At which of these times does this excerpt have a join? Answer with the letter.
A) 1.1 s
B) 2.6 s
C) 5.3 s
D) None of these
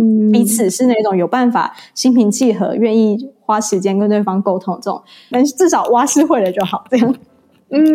C